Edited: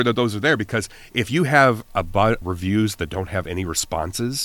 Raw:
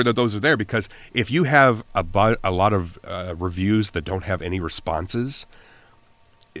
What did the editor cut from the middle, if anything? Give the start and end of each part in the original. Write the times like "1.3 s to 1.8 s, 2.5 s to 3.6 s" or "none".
2.4 s to 3.4 s